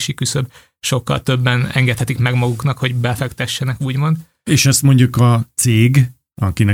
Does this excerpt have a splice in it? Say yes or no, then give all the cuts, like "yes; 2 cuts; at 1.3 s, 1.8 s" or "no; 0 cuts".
no; 0 cuts